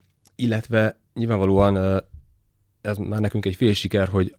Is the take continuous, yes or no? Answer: yes